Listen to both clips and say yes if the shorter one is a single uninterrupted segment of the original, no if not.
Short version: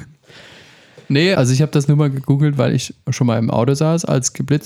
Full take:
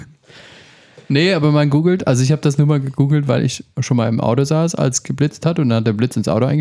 no